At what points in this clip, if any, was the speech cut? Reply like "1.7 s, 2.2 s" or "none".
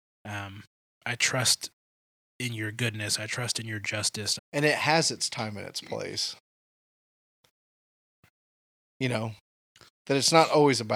4.4 s